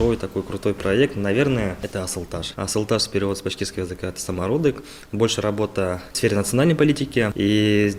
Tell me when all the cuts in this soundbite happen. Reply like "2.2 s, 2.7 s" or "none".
2.5 s

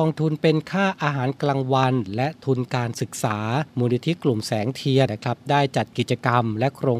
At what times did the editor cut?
3.7 s, 5.1 s

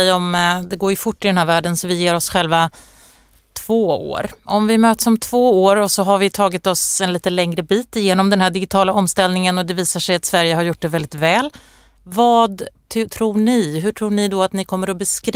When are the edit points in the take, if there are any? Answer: none

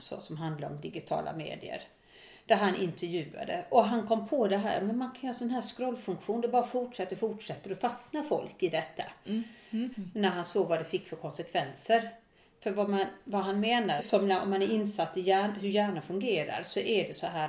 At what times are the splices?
7.1 s, 9.9 s, 14.0 s

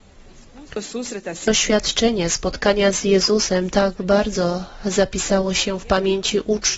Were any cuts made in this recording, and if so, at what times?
none

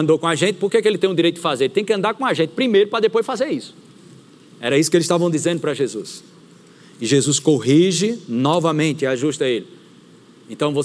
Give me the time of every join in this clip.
none

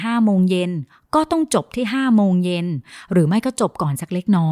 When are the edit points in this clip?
none

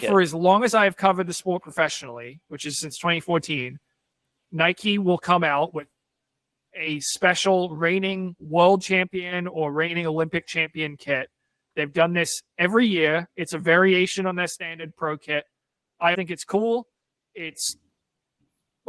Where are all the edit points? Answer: 16.1 s

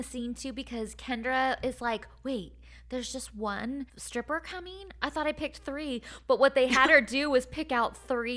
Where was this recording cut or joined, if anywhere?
3.9 s

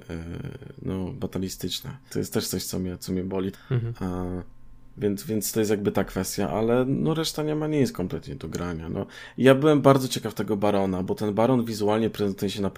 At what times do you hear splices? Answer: 2.1 s, 3.5 s

